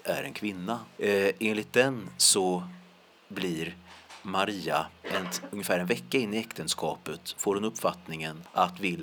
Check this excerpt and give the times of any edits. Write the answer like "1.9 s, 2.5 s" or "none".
1.0 s